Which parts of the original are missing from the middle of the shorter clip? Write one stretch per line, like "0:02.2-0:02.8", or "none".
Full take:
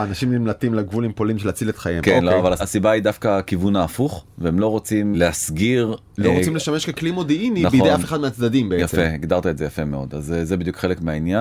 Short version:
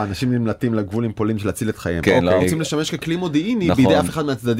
0:02.4-0:06.3

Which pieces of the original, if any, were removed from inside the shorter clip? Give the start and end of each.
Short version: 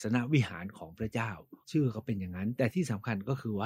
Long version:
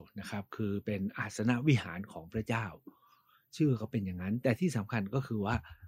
0:03.0-0:03.5

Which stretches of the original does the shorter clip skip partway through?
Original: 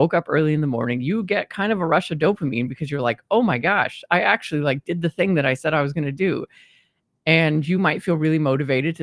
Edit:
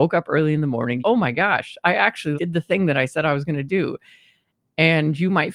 0:01.0-0:03.3
0:04.6-0:04.8

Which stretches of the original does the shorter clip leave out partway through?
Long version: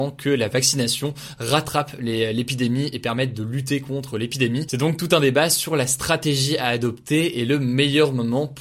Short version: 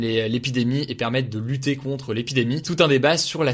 0:04.7-0:05.0

